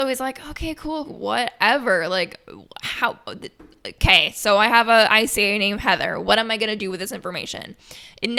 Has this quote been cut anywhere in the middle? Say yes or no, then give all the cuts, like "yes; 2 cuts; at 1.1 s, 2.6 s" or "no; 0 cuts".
yes; 1 cut; at 1.0 s